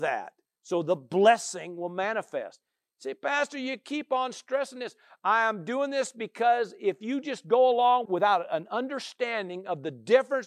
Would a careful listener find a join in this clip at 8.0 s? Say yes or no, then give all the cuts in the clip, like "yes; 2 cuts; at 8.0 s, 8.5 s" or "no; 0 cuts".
yes; 1 cut; at 8.0 s